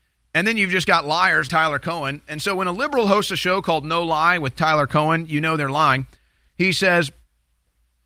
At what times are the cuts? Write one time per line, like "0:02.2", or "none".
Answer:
0:01.5